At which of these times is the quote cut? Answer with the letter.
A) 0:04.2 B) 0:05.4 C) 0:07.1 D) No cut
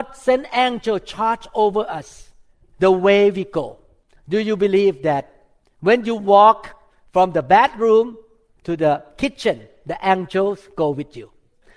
A